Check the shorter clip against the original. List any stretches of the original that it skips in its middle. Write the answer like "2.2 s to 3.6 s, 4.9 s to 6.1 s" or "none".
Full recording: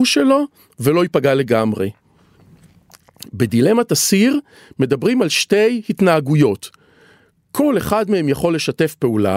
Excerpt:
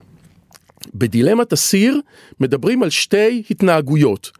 none